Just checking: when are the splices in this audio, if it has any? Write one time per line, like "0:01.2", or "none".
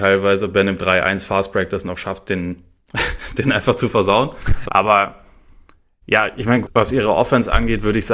0:04.7
0:06.6

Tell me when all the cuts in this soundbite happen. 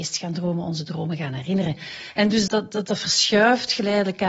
0:02.5

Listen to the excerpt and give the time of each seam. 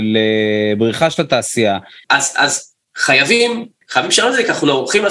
0:02.0
0:03.8

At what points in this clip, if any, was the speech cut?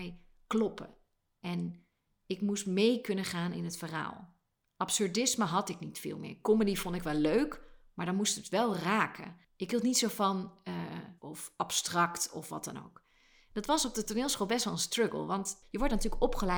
0:11.2

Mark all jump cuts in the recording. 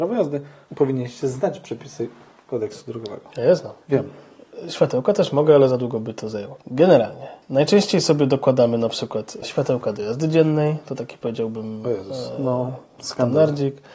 none

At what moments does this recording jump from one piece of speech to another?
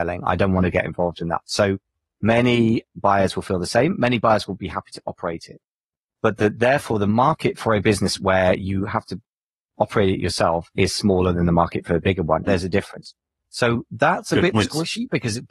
0:12.5

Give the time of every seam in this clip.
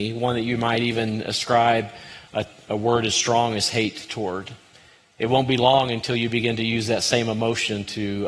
none

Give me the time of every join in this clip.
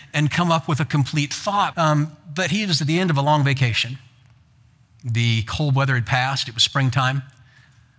0:01.7

